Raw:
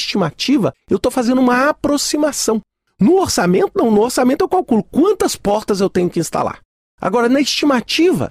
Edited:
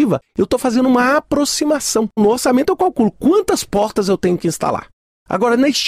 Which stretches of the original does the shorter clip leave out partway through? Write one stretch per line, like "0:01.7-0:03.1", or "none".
0:02.7-0:03.9